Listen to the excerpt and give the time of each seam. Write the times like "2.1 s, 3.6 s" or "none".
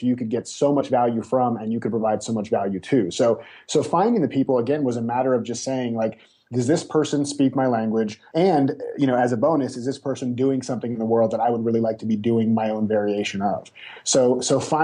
8.3 s